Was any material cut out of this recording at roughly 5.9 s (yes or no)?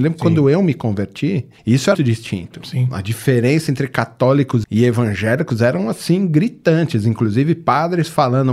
no